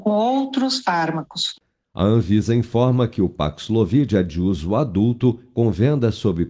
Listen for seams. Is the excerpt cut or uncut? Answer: uncut